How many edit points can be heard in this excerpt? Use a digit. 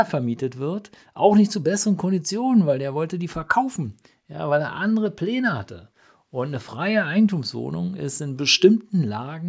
0